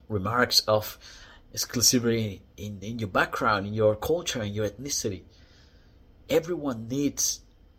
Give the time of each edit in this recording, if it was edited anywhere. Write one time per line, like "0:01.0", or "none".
none